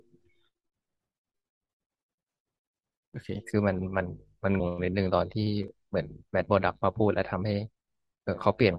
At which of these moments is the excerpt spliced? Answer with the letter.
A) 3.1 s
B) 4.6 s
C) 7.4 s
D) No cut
B